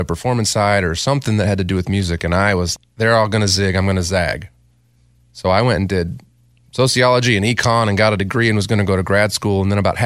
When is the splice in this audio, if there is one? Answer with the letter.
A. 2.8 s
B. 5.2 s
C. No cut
A